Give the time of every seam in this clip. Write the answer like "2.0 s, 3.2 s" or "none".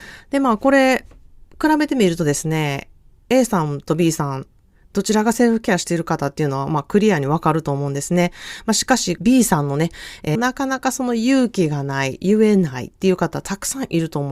9.2 s, 10.3 s